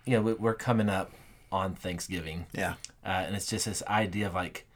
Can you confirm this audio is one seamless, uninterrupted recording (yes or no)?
yes